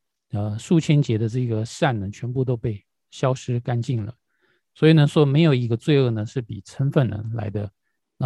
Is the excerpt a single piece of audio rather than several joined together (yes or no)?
yes